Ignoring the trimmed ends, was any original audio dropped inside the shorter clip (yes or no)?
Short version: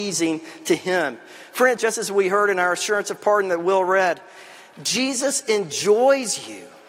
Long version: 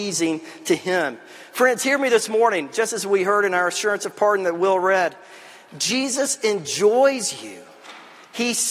yes